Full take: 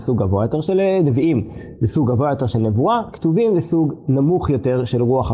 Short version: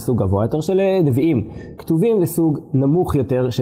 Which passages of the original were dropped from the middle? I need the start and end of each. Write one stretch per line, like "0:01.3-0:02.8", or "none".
0:01.8-0:03.1

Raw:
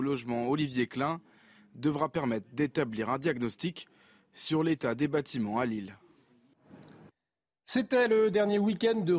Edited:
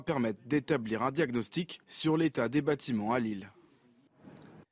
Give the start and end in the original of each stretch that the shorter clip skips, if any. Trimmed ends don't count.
0:03.9-0:04.3

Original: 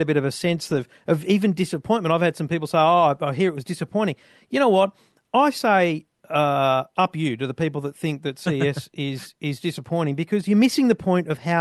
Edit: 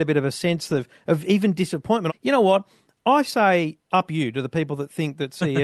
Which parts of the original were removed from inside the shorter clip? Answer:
0:02.1-0:04.4
0:06.1-0:06.9

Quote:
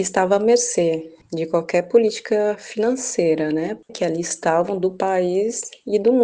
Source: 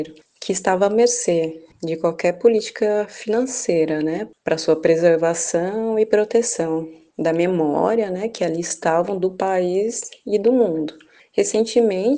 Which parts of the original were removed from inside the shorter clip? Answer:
0:04.4-0:08.3

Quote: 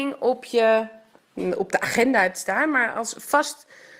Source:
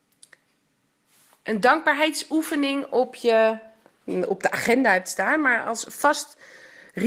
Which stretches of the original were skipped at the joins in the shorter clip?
none

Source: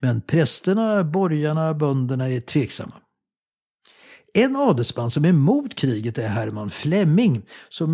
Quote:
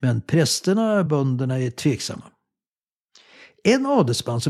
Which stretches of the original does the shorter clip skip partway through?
0:01.1-0:01.8

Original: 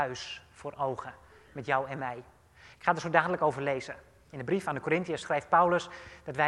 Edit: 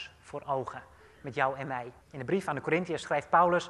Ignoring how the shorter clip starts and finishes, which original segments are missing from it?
0:02.3-0:04.2

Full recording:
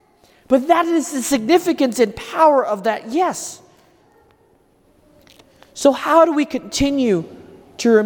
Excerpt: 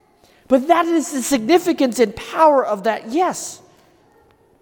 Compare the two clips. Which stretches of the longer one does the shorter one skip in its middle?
none

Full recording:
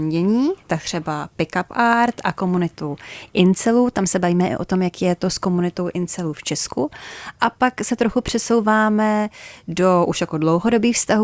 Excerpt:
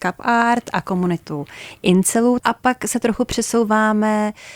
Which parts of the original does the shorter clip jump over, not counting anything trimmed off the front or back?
0:03.9-0:07.4

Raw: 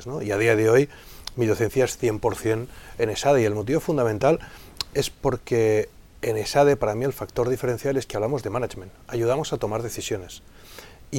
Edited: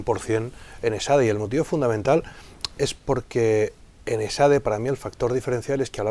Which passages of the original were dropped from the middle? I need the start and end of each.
none

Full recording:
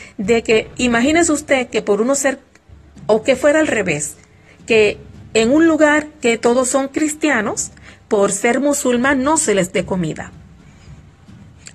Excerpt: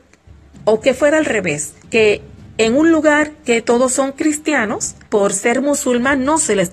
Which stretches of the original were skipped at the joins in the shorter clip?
0:04.2-0:04.6
0:07.8-0:08.0

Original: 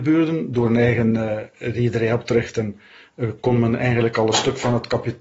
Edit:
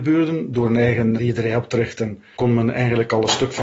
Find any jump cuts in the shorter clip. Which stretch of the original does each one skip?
0:01.2-0:01.7
0:02.9-0:03.4

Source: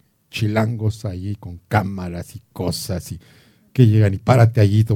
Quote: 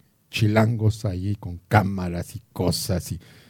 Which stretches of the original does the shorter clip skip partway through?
none

